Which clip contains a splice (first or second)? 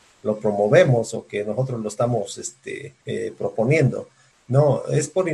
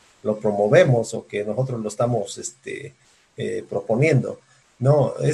first